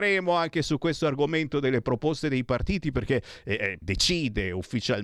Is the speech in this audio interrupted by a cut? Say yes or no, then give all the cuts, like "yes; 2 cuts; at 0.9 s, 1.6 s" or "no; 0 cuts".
yes; 1 cut; at 3.8 s